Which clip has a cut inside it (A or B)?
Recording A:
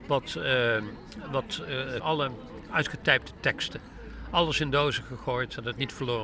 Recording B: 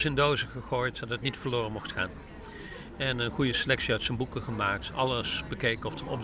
A